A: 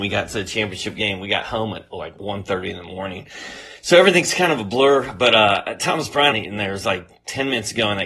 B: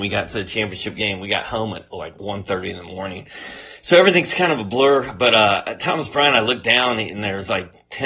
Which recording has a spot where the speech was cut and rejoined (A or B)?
A